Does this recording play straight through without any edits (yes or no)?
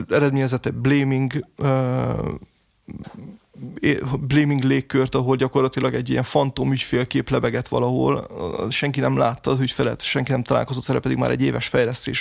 yes